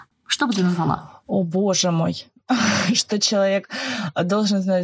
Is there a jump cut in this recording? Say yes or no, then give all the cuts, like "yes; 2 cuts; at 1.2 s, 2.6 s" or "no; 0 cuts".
no; 0 cuts